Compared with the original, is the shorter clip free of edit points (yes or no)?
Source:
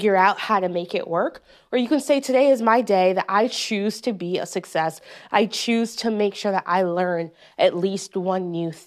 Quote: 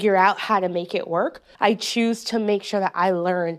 no